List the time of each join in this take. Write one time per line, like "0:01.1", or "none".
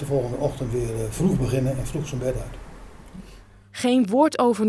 none